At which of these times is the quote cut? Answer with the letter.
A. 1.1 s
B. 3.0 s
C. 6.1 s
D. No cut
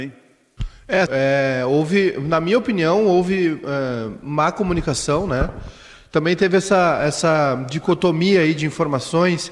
A